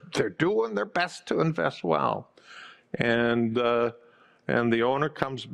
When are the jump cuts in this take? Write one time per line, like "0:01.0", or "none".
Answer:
none